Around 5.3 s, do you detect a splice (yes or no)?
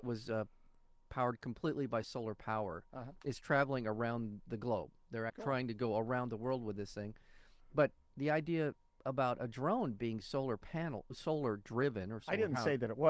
yes